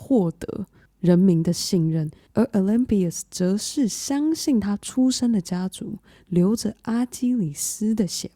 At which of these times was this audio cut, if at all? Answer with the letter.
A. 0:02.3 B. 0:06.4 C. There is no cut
A